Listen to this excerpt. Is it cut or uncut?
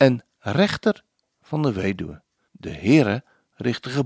cut